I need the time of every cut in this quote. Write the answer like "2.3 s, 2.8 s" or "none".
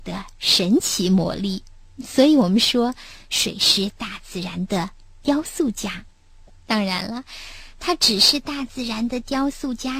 none